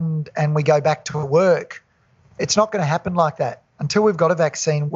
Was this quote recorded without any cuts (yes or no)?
yes